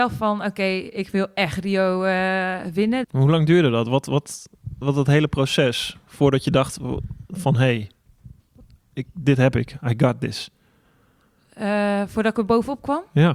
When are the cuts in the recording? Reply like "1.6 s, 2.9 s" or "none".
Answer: 3.0 s, 4.8 s